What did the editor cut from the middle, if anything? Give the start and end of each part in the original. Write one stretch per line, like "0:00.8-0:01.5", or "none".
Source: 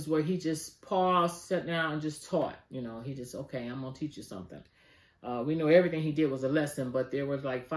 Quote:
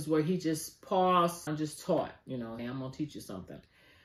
0:01.5-0:01.9
0:03.0-0:03.6